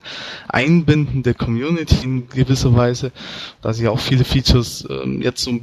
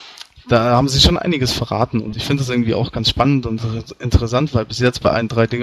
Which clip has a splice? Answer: first; 1 cut; at 3.6 s

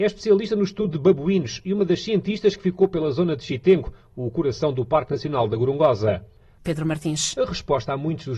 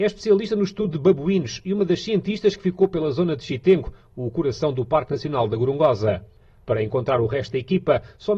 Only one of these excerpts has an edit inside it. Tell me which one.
first; 1 cut; at 6.6 s

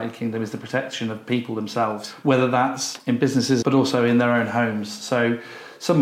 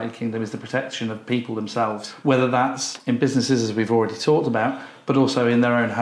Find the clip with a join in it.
first; 1 cut; at 3.6 s

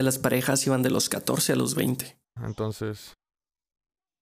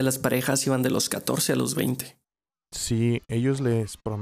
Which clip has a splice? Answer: first; 1 cut; at 2.4 s

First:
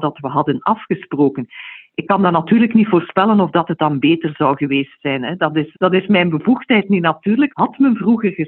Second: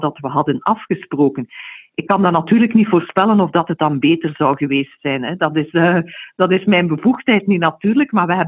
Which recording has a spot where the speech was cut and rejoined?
first; 2 cuts; at 5.7 s, 7.5 s

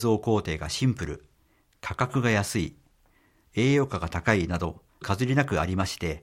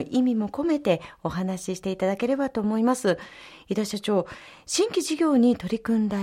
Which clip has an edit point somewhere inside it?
first; 1 cut; at 5.0 s

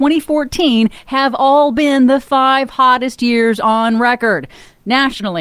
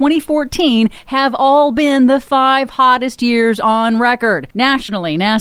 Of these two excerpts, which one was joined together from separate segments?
second; 1 cut; at 4.5 s

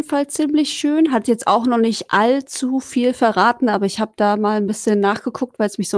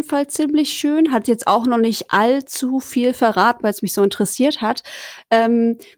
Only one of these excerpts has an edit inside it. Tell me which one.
second; 1 cut; at 3.6 s

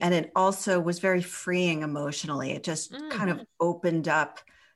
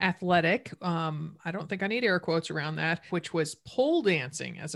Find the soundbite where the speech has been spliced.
second; 1 cut; at 3.1 s

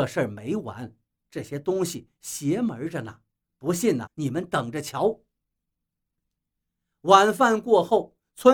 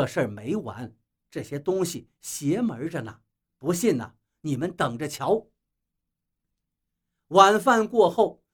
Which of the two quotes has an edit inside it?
first; 1 cut; at 4.1 s

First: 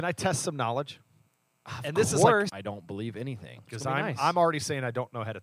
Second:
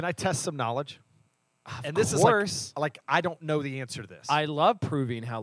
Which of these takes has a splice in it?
first; 2 cuts; at 2.5 s, 3.6 s

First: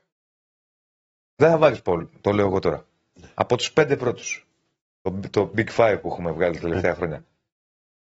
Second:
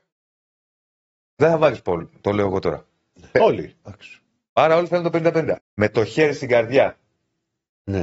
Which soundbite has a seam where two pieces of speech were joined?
second; 2 cuts; at 3.3 s, 5.6 s

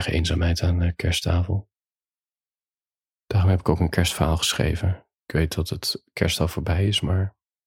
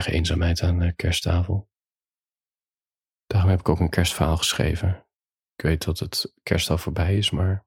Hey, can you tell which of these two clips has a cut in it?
first; 1 cut; at 5.2 s

